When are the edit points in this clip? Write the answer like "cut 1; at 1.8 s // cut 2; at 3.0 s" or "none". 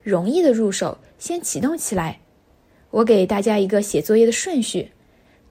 none